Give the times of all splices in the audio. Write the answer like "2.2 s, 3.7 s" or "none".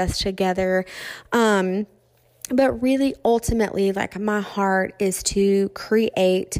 none